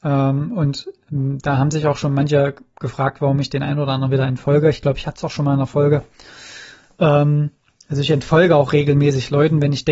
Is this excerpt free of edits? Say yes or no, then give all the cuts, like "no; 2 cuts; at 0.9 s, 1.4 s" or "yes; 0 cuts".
yes; 0 cuts